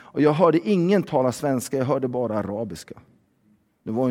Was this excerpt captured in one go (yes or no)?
yes